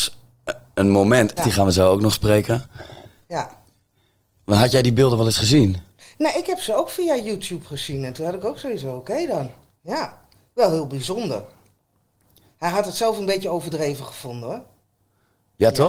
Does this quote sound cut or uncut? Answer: cut